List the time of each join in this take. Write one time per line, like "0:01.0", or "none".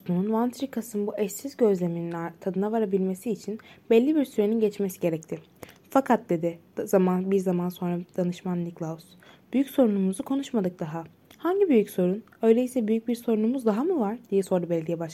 none